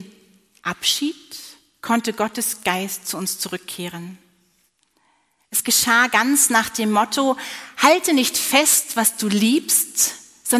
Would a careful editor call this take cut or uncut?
uncut